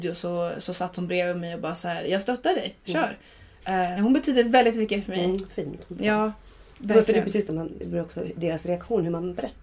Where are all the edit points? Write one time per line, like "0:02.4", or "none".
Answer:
0:04.0
0:07.5